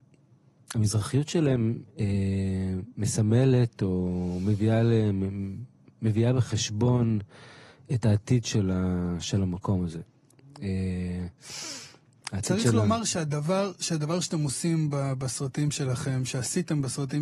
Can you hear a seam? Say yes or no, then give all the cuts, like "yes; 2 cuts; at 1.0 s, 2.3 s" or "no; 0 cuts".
no; 0 cuts